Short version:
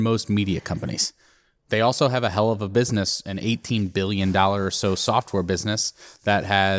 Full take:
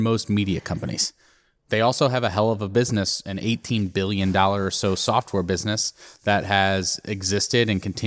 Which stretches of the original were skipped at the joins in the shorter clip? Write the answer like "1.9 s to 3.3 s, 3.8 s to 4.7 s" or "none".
none